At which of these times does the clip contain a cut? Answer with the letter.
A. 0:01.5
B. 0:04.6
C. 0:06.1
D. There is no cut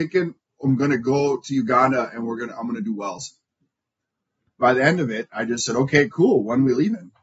B